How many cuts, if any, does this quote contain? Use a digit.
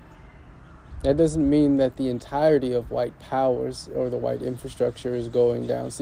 0